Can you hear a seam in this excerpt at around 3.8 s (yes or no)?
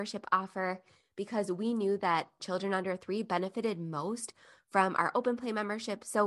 no